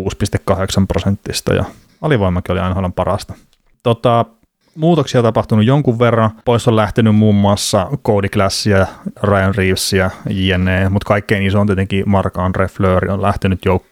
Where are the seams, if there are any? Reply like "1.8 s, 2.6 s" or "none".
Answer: 6.4 s